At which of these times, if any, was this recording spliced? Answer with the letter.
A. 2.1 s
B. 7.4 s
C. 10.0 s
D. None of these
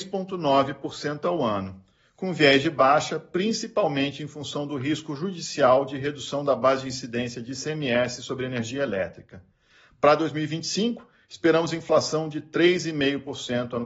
D